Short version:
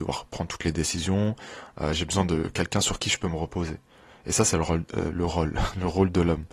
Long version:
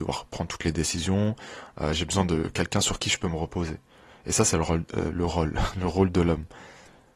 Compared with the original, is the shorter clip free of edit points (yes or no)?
yes